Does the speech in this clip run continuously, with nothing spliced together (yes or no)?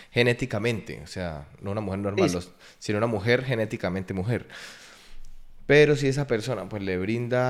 yes